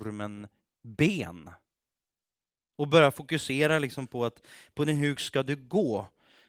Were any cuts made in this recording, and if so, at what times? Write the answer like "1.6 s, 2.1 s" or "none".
5.2 s